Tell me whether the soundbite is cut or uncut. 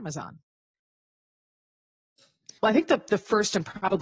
cut